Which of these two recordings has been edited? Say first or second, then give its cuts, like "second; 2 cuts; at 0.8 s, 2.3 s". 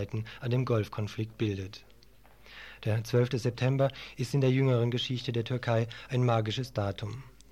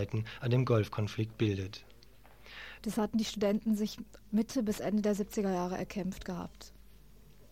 second; 1 cut; at 2.8 s